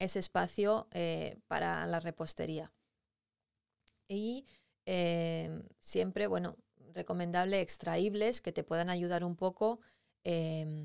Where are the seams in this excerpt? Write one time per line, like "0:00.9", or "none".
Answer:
none